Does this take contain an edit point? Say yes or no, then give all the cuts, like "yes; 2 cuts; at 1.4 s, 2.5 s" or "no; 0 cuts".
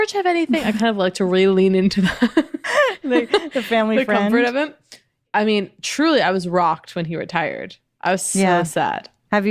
no; 0 cuts